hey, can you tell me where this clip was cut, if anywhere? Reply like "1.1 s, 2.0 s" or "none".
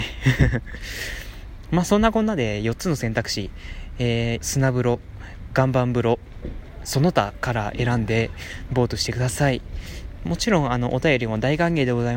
4.4 s